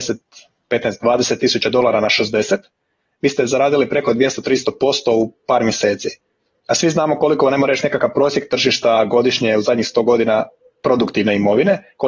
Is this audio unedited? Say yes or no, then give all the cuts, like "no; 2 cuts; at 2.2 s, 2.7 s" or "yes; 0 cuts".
yes; 0 cuts